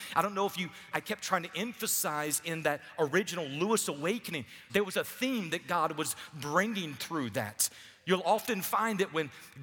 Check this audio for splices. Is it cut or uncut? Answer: cut